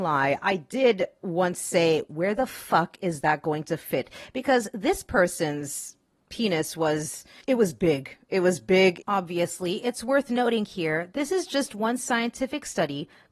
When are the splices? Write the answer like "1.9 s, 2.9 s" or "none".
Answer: 7.4 s, 9.0 s